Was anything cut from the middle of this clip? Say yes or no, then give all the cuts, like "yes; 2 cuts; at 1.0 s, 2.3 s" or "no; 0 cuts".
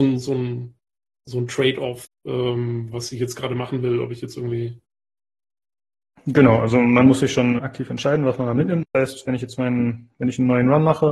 yes; 2 cuts; at 7.6 s, 8.8 s